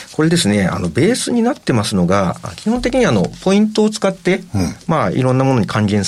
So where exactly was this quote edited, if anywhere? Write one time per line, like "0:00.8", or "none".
none